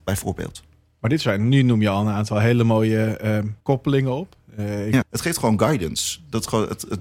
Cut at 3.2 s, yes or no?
no